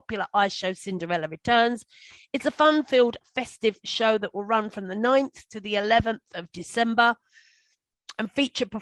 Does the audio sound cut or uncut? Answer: uncut